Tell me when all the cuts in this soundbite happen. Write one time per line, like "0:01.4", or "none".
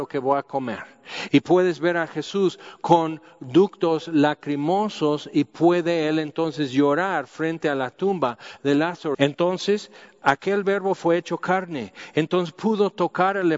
0:01.3
0:09.1